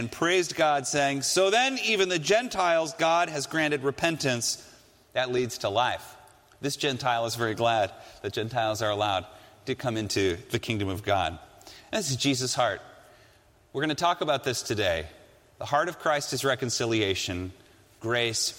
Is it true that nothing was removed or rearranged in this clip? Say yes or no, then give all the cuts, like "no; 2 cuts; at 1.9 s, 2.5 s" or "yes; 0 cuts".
yes; 0 cuts